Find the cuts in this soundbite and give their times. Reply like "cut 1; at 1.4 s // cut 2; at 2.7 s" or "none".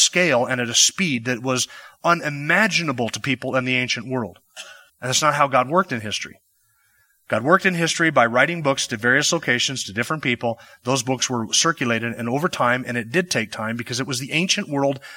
cut 1; at 4.9 s